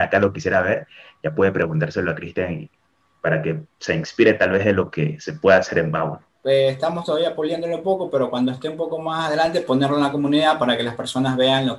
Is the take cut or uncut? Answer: uncut